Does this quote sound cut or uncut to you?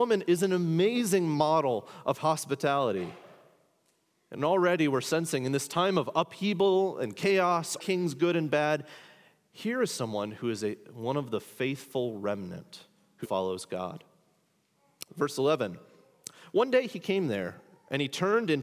cut